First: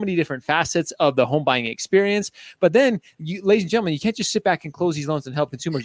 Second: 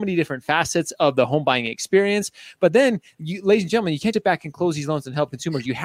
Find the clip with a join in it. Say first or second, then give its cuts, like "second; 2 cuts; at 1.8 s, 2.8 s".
second; 1 cut; at 4.1 s